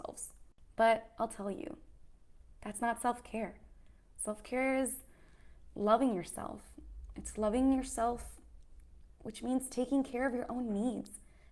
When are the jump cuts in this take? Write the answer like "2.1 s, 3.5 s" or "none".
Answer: none